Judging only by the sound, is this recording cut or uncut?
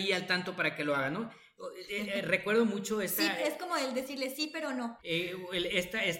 cut